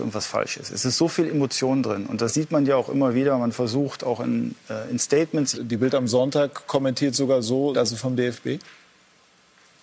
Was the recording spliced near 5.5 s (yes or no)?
yes